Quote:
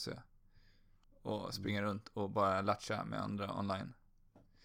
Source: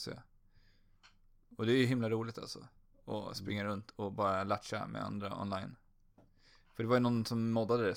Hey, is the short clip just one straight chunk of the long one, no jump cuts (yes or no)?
no